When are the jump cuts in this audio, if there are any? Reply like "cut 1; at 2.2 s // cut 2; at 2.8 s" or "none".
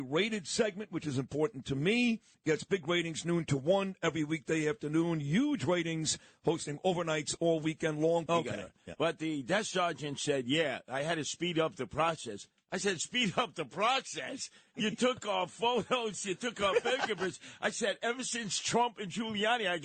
cut 1; at 2.3 s // cut 2; at 8.3 s